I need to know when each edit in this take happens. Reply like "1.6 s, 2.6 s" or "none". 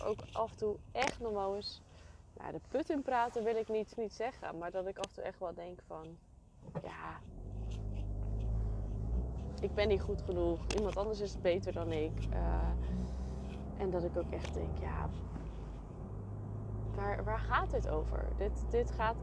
3.9 s